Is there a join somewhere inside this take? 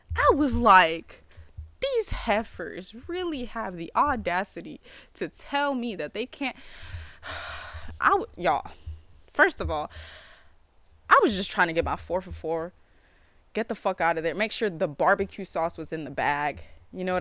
no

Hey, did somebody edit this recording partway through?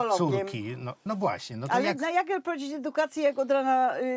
no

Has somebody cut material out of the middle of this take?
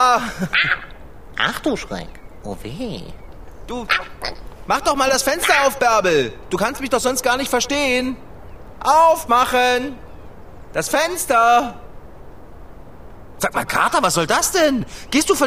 no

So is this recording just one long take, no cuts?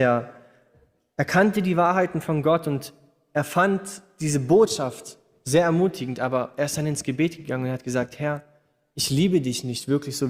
yes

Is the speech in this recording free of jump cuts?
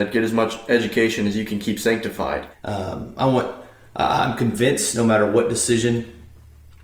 no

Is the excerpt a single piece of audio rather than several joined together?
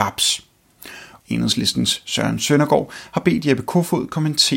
no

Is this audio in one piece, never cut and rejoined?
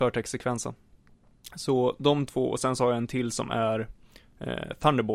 yes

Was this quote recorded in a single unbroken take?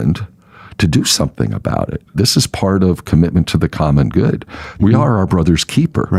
no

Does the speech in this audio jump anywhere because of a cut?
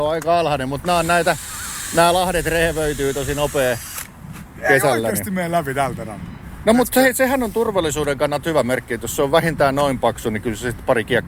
no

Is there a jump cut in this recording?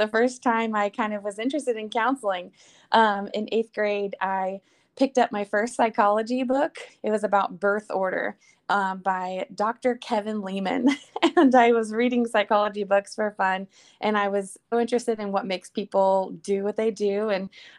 yes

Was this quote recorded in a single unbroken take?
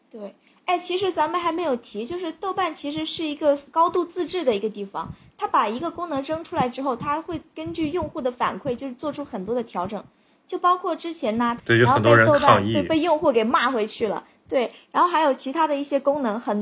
no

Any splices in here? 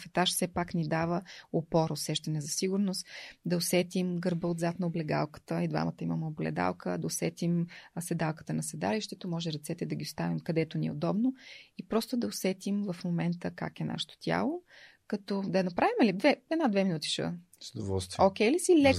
no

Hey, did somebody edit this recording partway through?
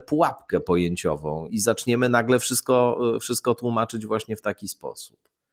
yes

